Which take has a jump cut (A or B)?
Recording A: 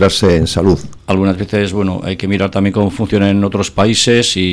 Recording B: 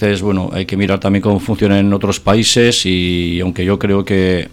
A